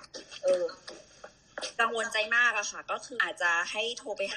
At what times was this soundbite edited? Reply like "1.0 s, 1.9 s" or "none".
3.2 s